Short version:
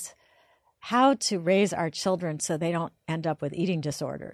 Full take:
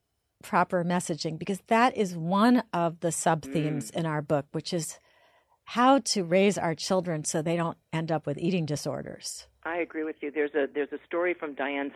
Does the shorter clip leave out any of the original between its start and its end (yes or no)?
no